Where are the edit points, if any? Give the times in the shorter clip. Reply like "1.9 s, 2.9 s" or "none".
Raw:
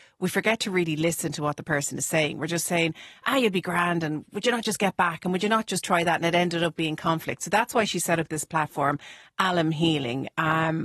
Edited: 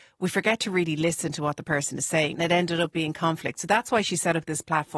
2.4 s